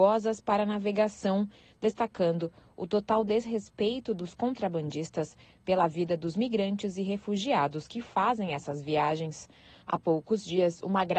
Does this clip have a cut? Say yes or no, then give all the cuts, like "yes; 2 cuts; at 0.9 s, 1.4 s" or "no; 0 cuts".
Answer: no; 0 cuts